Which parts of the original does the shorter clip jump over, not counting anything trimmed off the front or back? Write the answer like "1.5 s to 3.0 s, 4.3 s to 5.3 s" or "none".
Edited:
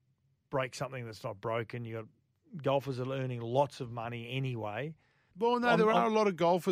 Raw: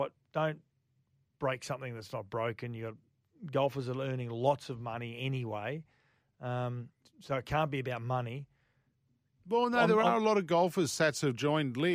6.2 s to 9.4 s